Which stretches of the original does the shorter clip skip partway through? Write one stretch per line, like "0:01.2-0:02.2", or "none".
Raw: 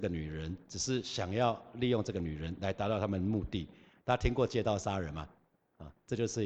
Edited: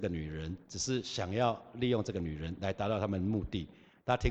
none